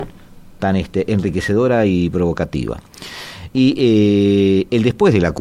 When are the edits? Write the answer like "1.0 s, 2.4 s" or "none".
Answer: 3.5 s